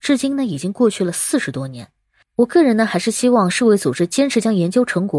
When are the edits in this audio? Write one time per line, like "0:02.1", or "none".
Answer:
0:02.2